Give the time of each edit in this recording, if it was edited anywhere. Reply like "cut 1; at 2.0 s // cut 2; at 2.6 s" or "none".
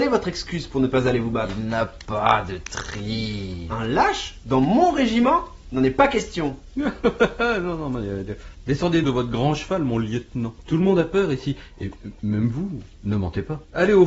cut 1; at 9.0 s